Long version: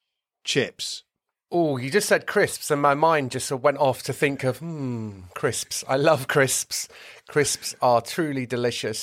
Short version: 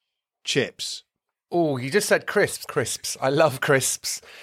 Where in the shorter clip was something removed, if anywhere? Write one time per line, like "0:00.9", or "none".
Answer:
0:02.6